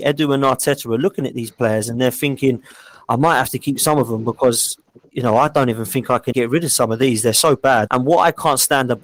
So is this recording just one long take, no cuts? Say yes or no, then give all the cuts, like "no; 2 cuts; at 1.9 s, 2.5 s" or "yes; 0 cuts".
no; 2 cuts; at 6.3 s, 7.9 s